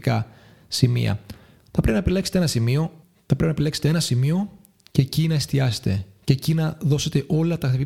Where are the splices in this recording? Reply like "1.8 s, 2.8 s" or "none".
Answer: 3.0 s